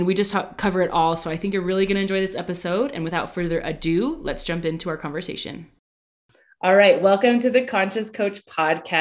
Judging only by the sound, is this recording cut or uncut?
uncut